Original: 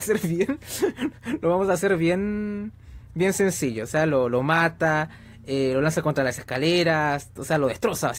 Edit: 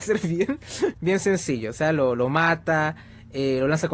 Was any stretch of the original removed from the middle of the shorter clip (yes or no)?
yes